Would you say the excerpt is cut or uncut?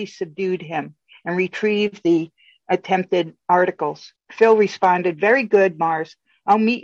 uncut